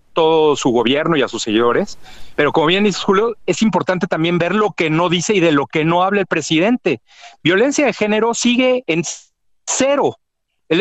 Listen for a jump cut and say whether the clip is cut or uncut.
uncut